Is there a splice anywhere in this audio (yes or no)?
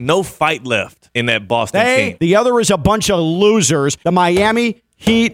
yes